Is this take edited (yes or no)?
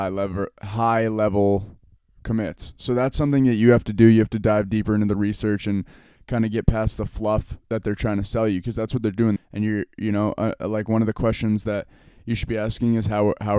yes